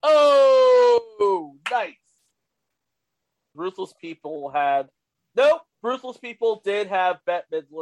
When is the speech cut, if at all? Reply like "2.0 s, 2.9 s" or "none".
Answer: 3.5 s, 5.7 s